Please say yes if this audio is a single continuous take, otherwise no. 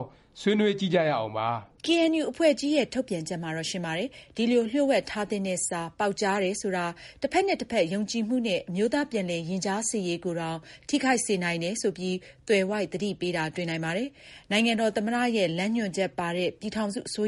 no